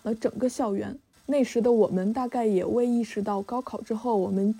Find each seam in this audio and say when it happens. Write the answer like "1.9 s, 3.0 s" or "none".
none

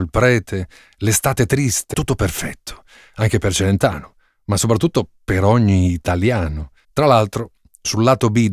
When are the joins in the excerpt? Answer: 1.9 s, 6.8 s

